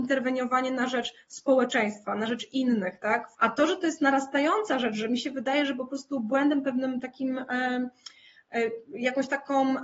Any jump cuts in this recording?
yes; 1 cut; at 3.3 s

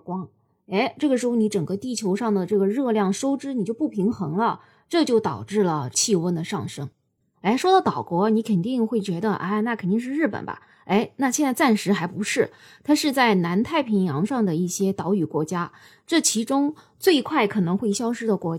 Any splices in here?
yes; 1 cut; at 7.3 s

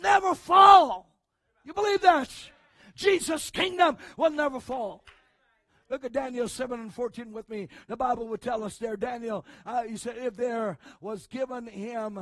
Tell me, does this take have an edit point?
no; 0 cuts

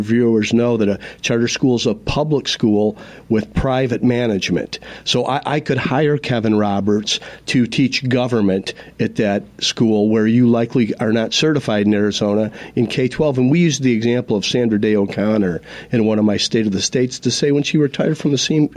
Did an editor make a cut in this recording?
no; 0 cuts

